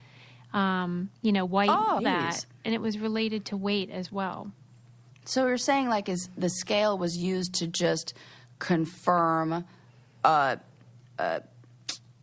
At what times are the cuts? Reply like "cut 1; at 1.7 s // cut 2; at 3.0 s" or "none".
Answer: cut 1; at 2.0 s